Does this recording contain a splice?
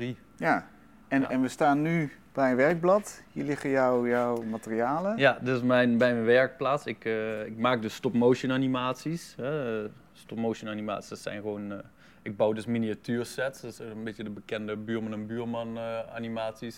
no; 0 cuts

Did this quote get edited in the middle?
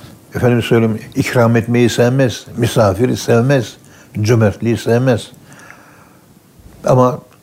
no; 0 cuts

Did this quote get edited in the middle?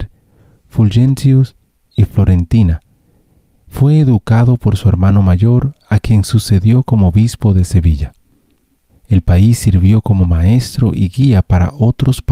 yes; 1 cut; at 8.9 s

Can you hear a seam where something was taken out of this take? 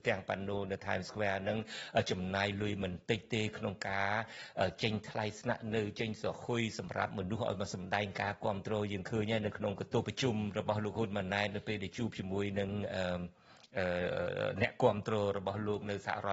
yes; 1 cut; at 10.0 s

